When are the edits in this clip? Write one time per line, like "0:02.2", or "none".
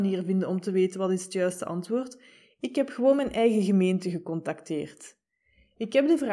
none